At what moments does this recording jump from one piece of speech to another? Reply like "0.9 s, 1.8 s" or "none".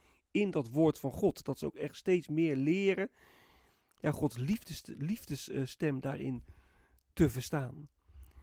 none

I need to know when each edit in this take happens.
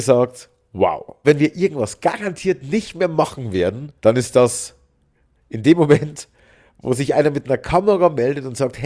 1.2 s, 4.0 s

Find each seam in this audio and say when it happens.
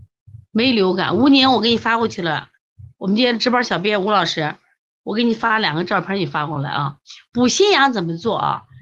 none

